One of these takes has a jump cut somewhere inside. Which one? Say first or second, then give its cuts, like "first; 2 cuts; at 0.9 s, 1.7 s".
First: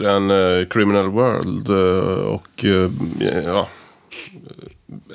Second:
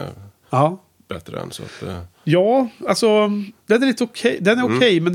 second; 1 cut; at 3.6 s